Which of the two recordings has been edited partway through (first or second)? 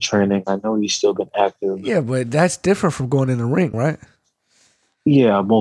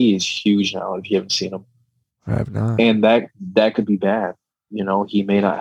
first